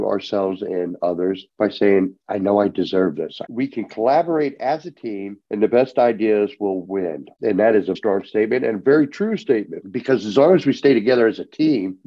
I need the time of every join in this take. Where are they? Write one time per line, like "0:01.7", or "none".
0:03.5
0:08.0